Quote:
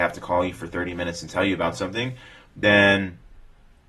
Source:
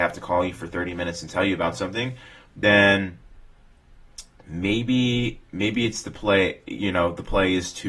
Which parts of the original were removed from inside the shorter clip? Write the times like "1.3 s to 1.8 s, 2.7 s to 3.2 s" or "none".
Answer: none